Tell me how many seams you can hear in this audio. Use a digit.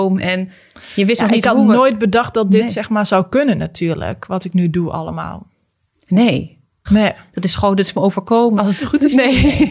2